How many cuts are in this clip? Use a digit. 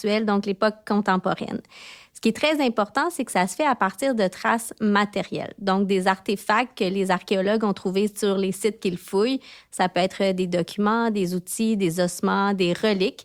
0